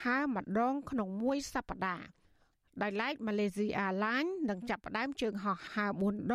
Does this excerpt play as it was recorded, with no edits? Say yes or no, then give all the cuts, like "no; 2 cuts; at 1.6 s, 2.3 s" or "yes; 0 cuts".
yes; 0 cuts